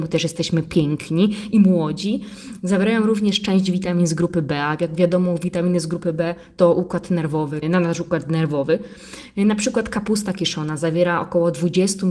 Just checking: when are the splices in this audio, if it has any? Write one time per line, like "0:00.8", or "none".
0:07.6